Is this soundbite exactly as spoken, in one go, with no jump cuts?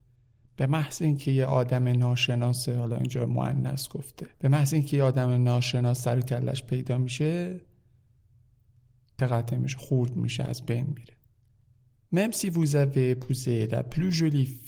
no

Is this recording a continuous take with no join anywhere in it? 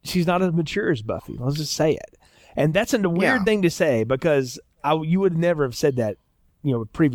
yes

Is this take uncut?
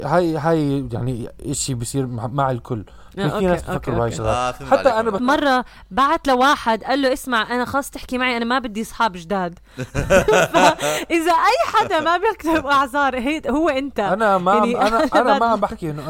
no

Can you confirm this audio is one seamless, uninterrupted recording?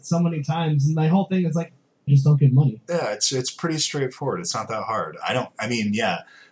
no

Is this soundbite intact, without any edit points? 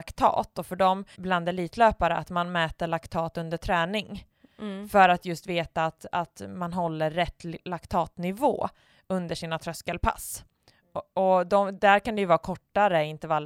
no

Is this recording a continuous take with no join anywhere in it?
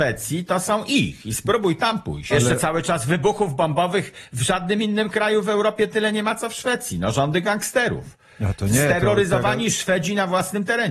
no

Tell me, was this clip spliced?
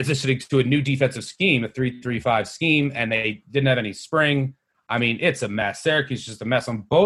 no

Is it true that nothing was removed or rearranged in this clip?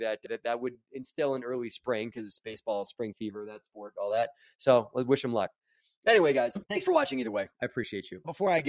yes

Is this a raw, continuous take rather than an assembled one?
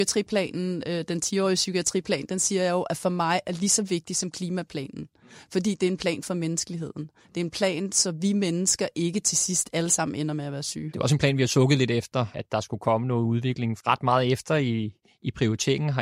no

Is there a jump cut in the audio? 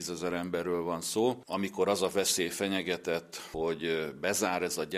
no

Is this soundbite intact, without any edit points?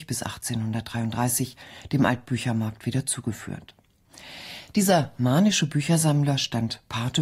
yes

